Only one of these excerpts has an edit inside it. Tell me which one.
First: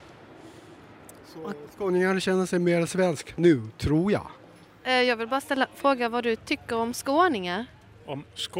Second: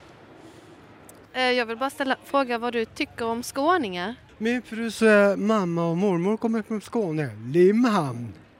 second; 2 cuts; at 1.3 s, 4.3 s

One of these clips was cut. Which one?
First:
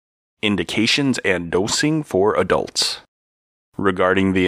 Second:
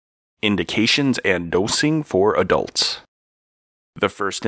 first; 1 cut; at 3.6 s

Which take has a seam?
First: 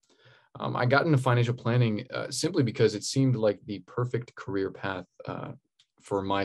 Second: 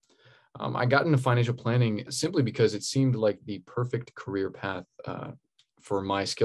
second; 1 cut; at 2.1 s

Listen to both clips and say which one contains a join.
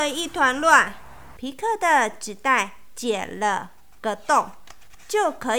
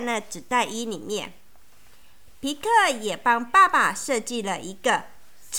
first; 1 cut; at 1.4 s

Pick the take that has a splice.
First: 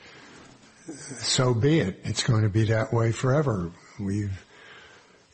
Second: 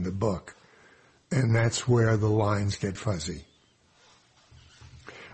second; 1 cut; at 3.0 s

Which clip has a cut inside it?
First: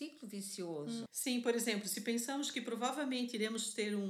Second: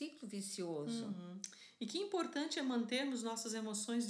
first; 1 cut; at 1.1 s

